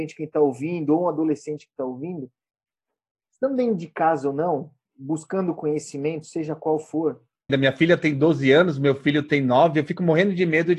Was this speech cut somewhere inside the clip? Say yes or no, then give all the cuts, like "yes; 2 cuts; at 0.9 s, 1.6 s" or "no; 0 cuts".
yes; 1 cut; at 7.5 s